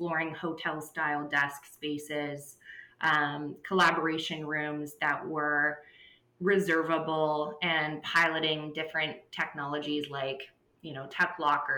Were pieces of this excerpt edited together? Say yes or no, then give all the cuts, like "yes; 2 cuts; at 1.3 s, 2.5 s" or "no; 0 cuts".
no; 0 cuts